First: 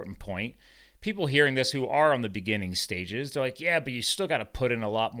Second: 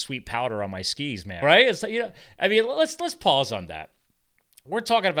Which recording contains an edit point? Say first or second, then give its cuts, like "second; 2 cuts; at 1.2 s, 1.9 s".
second; 1 cut; at 1.4 s